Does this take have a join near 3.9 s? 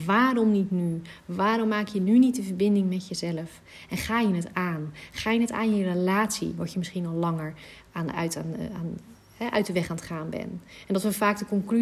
no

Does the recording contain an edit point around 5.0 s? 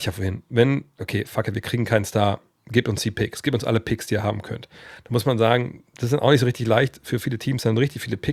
no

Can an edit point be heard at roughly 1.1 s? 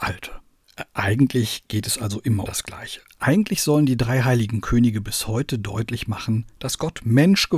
no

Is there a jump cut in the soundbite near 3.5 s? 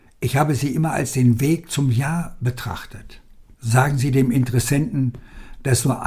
yes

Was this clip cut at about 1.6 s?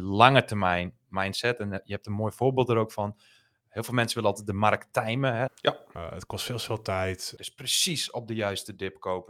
no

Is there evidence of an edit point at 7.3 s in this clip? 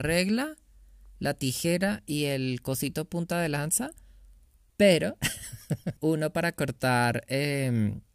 no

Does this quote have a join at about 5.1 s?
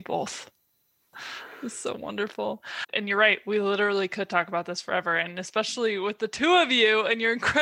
no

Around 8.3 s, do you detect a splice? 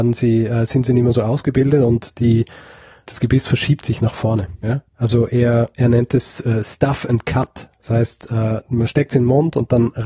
no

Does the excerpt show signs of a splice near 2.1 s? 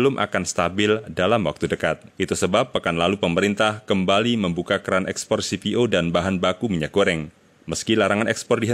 yes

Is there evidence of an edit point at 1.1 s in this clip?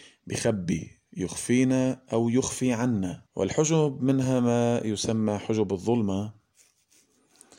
yes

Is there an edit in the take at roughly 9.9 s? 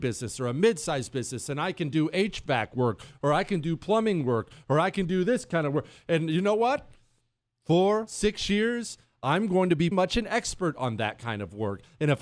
yes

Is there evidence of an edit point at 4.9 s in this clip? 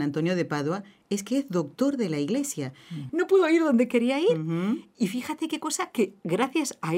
no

